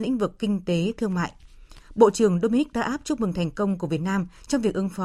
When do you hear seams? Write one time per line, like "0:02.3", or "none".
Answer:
none

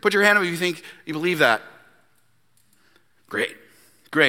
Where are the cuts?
none

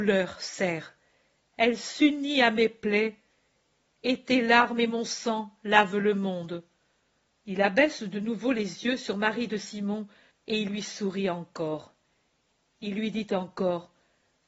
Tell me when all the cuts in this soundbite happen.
0:07.3
0:10.3

